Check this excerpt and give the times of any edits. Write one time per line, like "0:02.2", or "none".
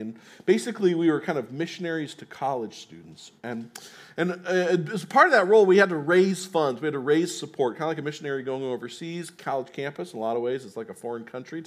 none